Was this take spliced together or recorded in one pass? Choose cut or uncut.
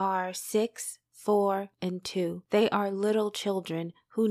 cut